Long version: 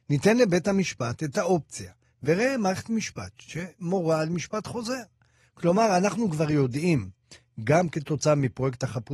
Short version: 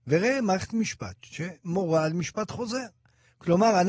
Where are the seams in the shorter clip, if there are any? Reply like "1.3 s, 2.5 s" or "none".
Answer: none

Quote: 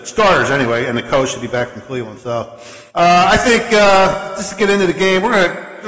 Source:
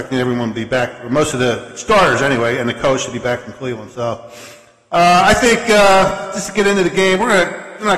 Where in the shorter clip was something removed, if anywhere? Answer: 2.9 s

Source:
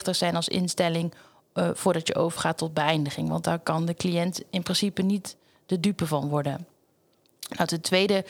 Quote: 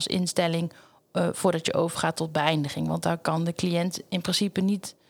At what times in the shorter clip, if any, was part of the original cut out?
none

